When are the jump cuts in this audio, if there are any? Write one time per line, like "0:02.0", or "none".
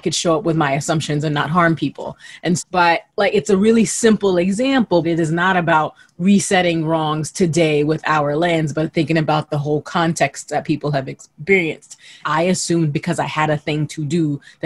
0:02.6
0:05.0
0:12.2